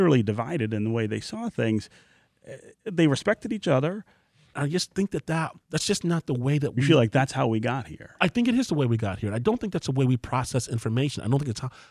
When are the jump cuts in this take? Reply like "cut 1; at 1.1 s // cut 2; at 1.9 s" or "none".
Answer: cut 1; at 4.5 s // cut 2; at 5.6 s